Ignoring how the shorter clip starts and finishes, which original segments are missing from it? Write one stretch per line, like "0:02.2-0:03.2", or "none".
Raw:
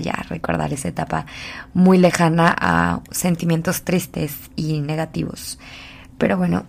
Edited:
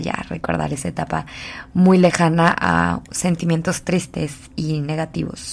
none